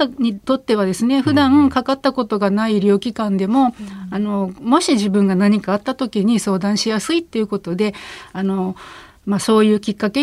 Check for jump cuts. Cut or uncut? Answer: uncut